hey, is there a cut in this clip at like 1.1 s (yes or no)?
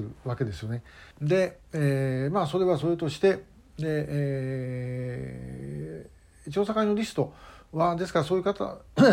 yes